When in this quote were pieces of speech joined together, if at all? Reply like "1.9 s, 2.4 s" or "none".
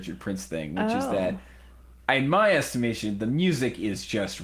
none